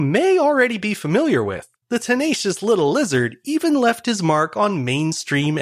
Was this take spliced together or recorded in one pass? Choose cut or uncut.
cut